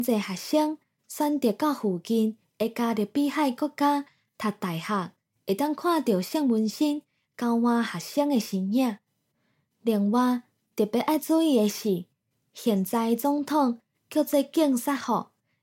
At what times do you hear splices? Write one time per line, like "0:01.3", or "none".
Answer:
0:05.3